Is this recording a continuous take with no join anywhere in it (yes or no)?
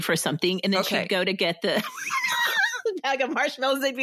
yes